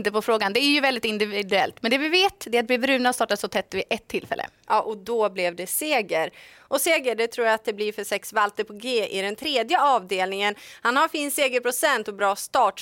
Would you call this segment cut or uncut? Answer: uncut